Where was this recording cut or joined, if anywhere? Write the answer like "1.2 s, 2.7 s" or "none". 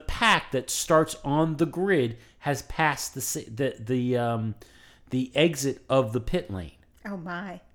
none